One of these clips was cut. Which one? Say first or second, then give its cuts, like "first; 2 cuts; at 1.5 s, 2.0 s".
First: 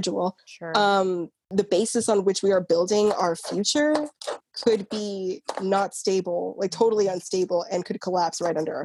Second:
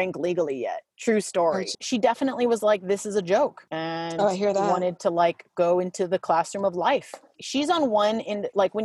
second; 1 cut; at 1.7 s